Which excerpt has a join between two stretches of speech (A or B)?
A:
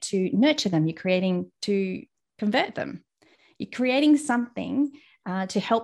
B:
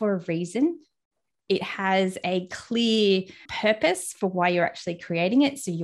B